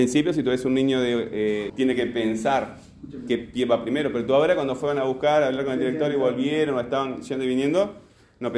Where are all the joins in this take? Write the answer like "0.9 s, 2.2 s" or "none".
1.7 s